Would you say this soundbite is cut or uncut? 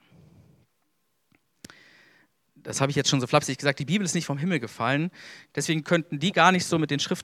cut